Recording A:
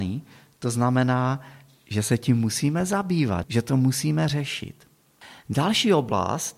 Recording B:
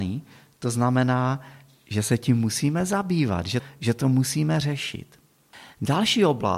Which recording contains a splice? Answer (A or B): A